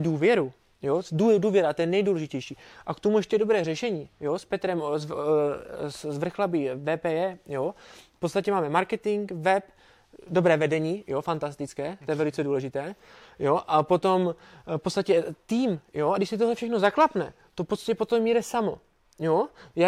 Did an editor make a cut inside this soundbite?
no; 0 cuts

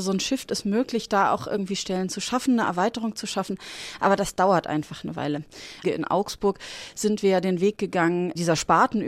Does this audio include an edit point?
yes; 1 cut; at 5.8 s

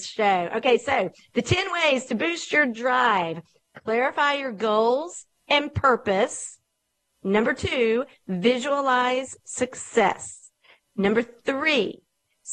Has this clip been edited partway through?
no; 0 cuts

